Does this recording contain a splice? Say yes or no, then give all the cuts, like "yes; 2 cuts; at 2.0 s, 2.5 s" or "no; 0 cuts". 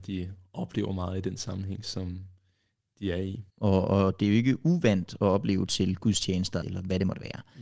yes; 2 cuts; at 3.5 s, 6.6 s